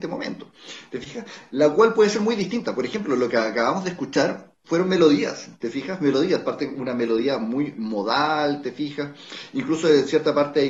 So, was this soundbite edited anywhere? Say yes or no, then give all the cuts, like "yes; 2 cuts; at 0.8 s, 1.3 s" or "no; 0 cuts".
no; 0 cuts